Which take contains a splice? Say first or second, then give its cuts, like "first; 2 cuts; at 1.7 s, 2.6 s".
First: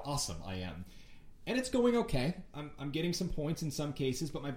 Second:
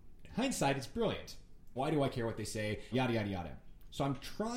second; 2 cuts; at 1.8 s, 2.9 s